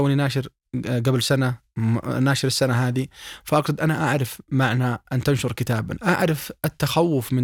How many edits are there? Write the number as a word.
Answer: one